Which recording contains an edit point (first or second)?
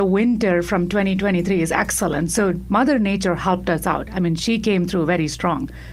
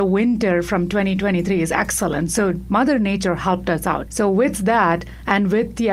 second